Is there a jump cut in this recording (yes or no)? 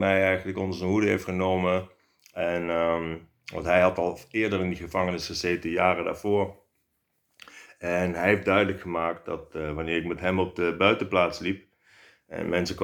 no